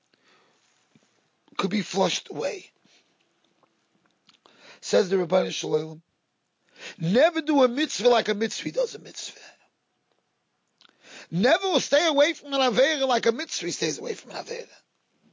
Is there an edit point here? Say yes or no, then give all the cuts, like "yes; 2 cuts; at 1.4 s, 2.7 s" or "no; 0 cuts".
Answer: no; 0 cuts